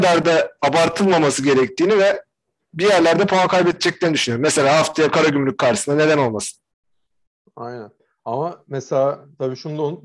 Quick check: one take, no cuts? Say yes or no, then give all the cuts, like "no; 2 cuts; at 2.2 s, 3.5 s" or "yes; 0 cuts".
yes; 0 cuts